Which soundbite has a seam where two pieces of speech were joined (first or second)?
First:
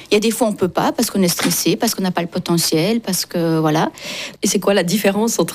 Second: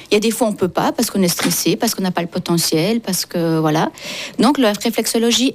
first